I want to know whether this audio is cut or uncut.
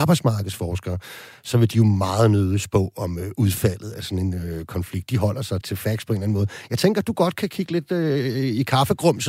cut